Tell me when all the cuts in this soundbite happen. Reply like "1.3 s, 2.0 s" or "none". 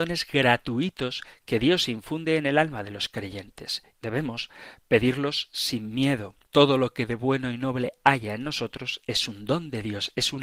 3.9 s, 6.5 s